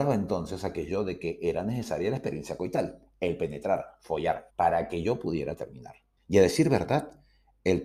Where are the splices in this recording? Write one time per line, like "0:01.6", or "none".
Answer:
0:04.5
0:06.2